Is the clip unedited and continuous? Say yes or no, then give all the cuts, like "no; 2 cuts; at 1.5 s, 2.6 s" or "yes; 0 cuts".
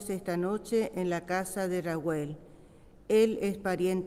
yes; 0 cuts